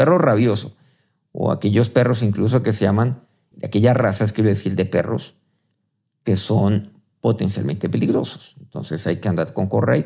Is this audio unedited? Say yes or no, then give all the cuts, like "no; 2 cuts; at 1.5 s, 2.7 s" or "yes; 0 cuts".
no; 1 cut; at 3.5 s